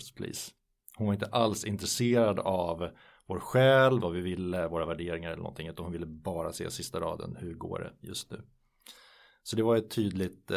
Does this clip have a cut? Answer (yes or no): yes